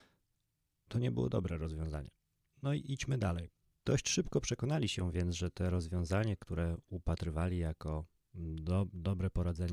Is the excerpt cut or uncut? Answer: cut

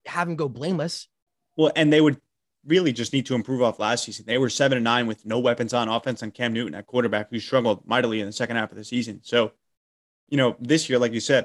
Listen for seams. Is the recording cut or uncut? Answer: uncut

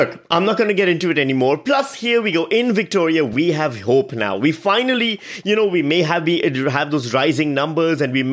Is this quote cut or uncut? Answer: uncut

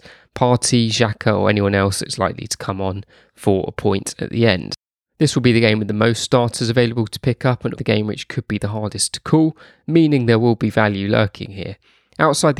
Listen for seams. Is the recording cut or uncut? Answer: cut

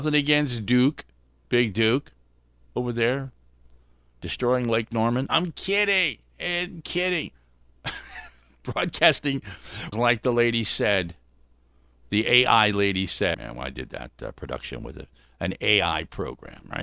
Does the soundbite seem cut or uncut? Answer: cut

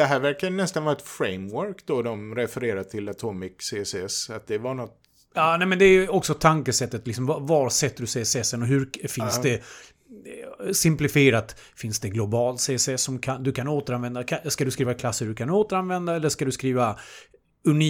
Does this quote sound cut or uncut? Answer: uncut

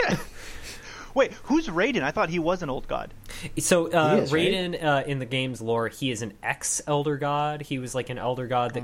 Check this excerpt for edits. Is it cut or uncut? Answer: uncut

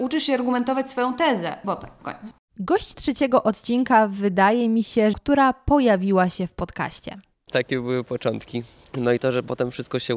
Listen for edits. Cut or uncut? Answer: cut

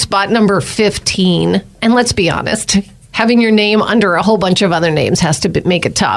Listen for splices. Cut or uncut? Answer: uncut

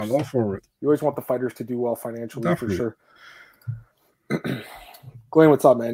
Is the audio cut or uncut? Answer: uncut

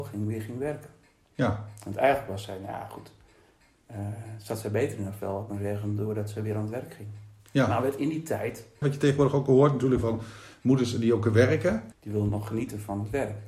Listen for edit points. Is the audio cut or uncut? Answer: cut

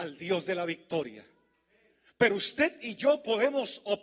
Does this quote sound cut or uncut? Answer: uncut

